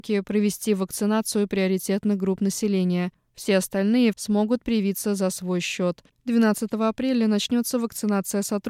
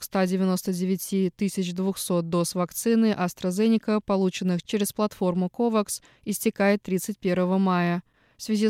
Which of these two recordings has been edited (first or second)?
first